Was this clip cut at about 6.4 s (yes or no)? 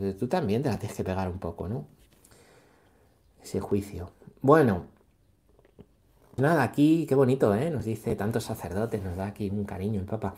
yes